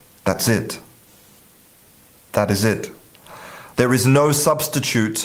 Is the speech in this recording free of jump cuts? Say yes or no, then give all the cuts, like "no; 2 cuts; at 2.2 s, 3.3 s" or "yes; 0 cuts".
no; 1 cut; at 3.7 s